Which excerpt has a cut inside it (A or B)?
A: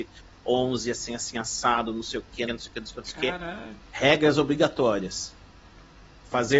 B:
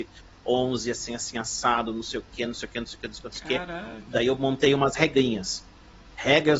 A